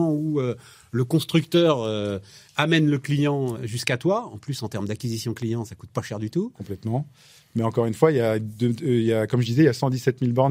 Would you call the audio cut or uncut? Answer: cut